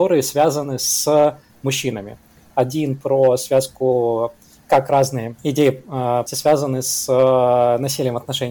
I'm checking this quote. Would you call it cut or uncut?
cut